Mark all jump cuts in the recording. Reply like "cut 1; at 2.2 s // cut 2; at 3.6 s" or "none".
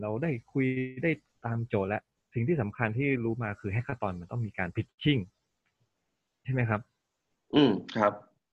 none